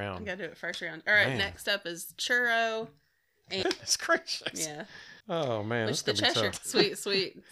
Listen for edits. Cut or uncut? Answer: cut